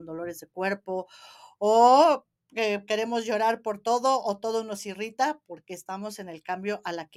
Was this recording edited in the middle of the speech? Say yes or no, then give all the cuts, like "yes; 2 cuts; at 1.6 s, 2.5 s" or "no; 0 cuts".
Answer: no; 0 cuts